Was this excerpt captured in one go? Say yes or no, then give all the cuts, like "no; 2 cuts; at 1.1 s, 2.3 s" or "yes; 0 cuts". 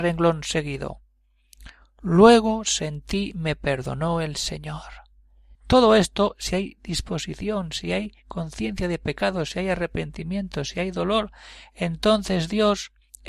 no; 1 cut; at 5.5 s